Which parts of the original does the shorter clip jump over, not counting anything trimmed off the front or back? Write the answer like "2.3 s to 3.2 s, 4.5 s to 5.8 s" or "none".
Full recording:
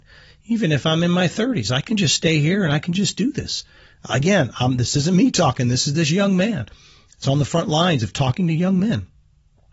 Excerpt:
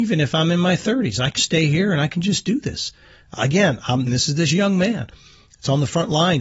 1.9 s to 2.1 s, 4.8 s to 5.6 s